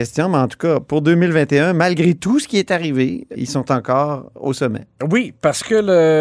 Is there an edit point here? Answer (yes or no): yes